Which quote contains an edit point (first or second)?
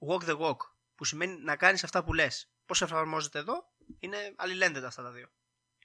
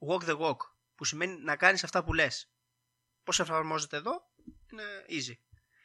first